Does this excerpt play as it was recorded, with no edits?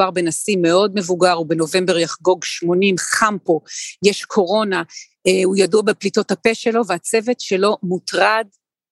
yes; 0 cuts

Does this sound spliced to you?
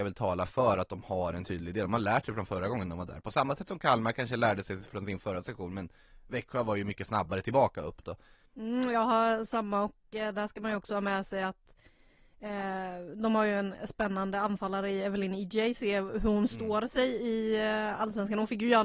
yes; 1 cut; at 8.5 s

